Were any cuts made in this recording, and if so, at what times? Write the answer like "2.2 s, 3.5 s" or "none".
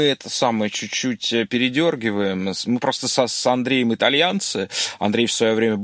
none